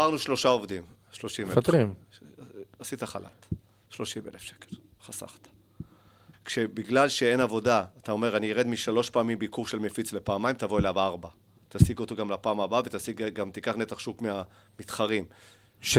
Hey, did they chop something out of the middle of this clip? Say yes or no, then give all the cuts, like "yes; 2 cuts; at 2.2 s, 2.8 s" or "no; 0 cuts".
yes; 1 cut; at 6.3 s